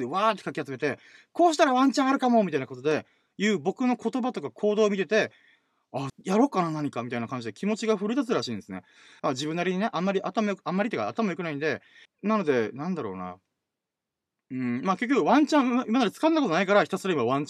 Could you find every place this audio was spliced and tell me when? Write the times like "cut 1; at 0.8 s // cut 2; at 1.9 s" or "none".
cut 1; at 6.1 s // cut 2; at 9.2 s // cut 3; at 12.0 s